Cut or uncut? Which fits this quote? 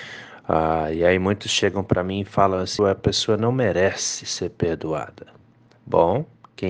cut